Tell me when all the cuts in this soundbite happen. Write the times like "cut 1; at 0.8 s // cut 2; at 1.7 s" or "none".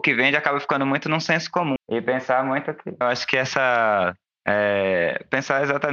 cut 1; at 1.8 s // cut 2; at 3.0 s